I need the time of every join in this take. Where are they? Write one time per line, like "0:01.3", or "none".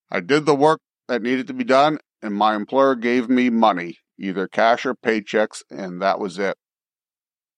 none